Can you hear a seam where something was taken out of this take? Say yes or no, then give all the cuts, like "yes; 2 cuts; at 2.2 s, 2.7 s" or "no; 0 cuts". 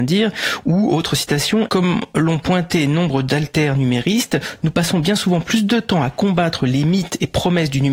yes; 1 cut; at 1.7 s